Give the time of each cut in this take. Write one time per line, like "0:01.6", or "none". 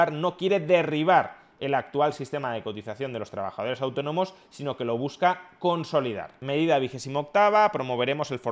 none